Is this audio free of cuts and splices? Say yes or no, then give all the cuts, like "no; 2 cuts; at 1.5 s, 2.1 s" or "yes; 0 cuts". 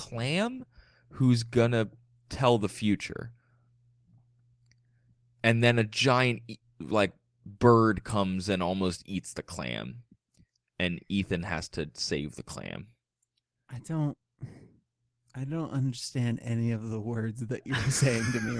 yes; 0 cuts